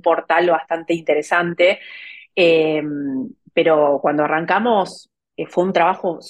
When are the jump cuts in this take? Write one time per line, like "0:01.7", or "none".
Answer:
none